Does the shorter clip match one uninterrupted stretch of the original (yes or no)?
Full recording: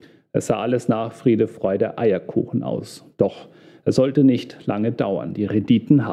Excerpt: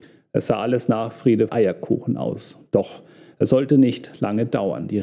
no